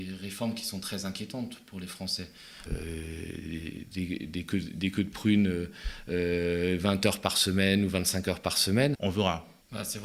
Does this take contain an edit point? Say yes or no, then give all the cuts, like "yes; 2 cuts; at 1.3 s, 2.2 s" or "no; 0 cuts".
yes; 2 cuts; at 2.7 s, 8.9 s